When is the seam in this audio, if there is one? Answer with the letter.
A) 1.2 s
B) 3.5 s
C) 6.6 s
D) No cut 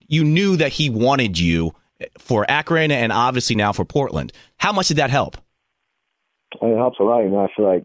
D